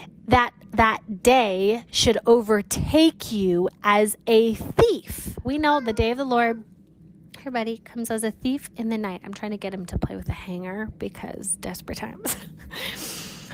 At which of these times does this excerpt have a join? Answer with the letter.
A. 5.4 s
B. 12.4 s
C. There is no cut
A